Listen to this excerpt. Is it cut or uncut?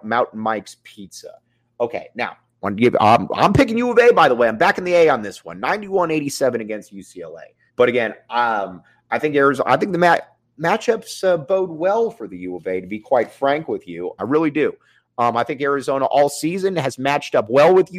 cut